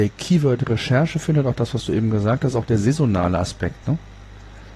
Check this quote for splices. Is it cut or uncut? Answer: uncut